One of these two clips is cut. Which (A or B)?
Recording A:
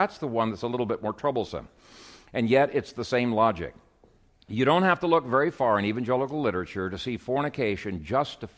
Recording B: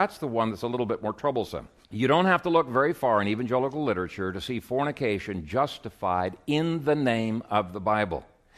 B